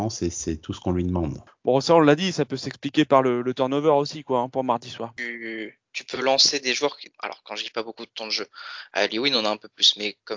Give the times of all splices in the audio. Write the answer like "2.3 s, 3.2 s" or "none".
1.5 s

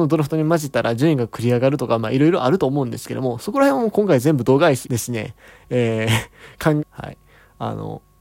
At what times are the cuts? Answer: 4.8 s, 6.8 s

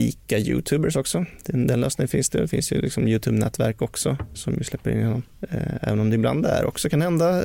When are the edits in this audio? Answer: none

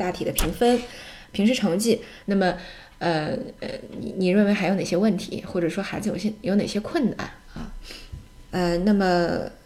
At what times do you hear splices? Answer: 2.2 s, 8.5 s

